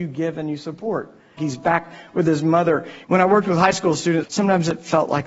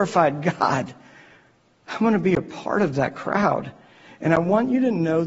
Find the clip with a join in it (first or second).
first